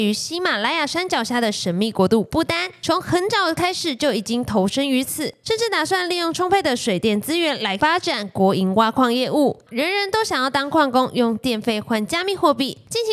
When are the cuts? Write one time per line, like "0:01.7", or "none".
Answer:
0:09.7